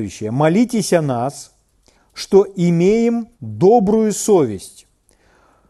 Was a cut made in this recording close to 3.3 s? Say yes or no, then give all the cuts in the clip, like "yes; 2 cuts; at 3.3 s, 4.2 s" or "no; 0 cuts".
yes; 2 cuts; at 1.9 s, 3.3 s